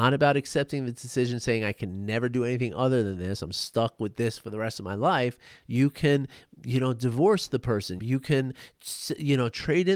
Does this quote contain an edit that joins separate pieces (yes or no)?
yes